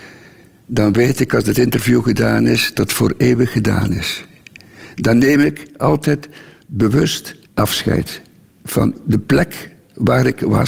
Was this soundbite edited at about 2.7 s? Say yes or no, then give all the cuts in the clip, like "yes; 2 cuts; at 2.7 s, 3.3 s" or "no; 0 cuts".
yes; 2 cuts; at 2.7 s, 7.4 s